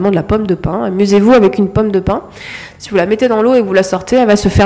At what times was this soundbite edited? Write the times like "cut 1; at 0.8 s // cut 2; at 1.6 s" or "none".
none